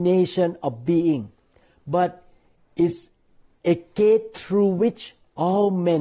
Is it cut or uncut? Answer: uncut